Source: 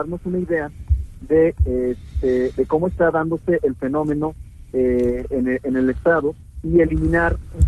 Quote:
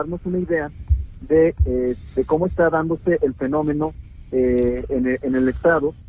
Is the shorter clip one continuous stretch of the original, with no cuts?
no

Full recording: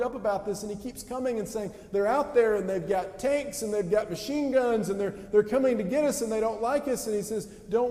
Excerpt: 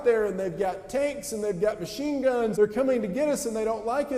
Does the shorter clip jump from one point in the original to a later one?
yes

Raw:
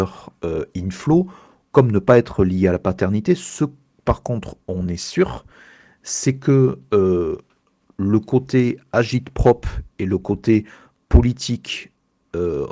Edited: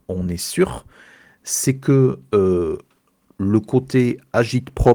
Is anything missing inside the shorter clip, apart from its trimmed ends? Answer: no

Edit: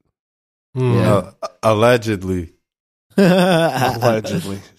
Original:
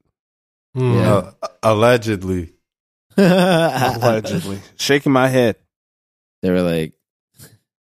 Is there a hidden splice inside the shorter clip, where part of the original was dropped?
no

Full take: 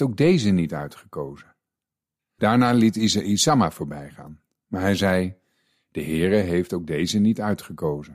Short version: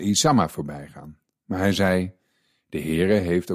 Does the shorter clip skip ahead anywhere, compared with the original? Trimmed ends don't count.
no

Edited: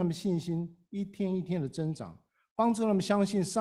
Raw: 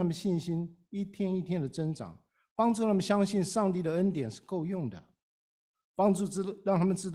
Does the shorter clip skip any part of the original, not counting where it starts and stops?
no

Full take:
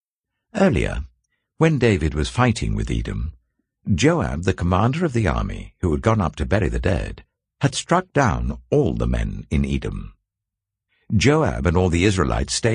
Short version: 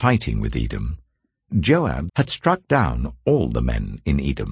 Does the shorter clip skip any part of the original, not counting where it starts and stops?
yes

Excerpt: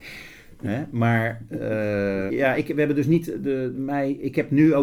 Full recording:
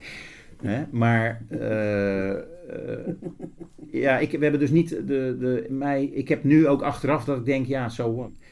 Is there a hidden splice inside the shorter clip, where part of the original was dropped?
yes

